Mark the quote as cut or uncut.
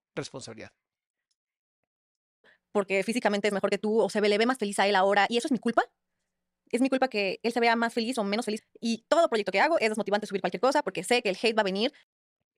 cut